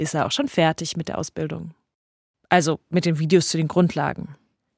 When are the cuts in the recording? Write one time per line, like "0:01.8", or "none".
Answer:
none